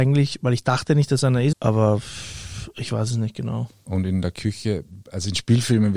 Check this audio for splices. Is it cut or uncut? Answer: cut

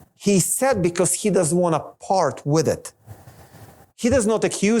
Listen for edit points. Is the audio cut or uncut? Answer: cut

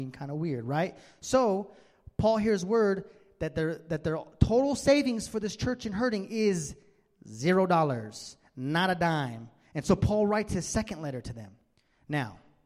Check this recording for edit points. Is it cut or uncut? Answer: uncut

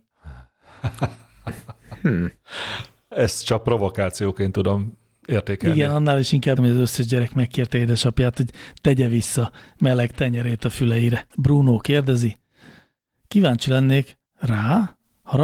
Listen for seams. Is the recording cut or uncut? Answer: cut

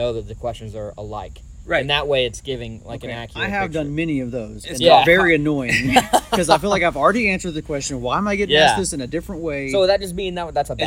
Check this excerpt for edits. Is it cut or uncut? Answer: uncut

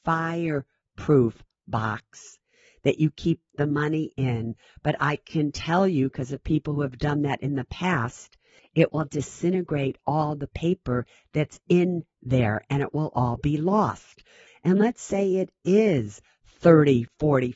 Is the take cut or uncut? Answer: cut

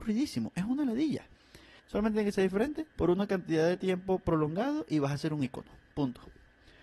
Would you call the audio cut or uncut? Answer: cut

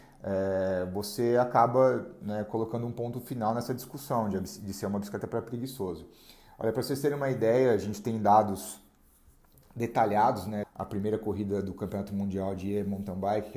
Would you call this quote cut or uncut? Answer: cut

